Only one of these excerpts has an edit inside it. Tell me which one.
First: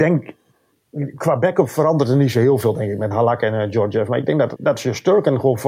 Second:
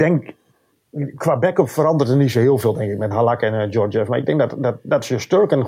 first; 1 cut; at 4.6 s

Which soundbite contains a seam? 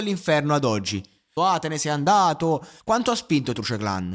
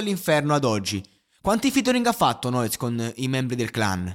first; 2 cuts; at 1.4 s, 2.8 s

